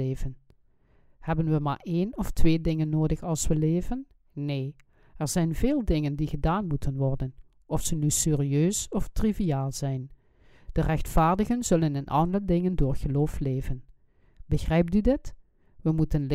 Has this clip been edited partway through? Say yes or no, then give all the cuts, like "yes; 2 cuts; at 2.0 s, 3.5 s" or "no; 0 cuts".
no; 0 cuts